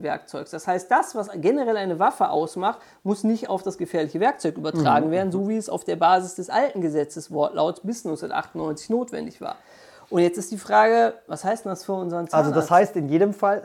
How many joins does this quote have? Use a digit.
0